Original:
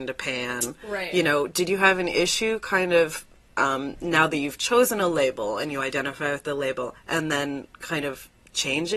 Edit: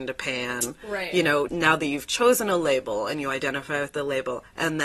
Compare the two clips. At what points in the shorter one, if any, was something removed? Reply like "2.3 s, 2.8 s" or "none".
1.5 s